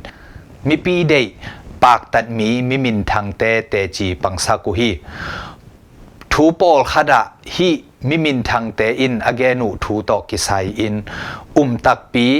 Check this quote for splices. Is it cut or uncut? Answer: cut